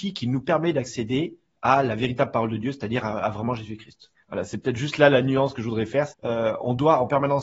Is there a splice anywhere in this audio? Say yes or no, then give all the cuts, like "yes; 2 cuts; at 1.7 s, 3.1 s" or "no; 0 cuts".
yes; 2 cuts; at 4.1 s, 6.1 s